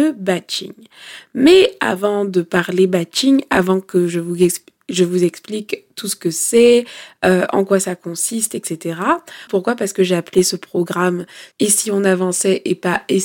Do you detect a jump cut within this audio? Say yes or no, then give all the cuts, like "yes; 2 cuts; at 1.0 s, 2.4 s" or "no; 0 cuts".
yes; 2 cuts; at 9.5 s, 11.5 s